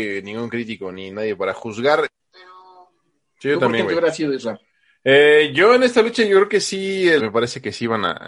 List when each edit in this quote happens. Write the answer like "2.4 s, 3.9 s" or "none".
2.1 s, 7.2 s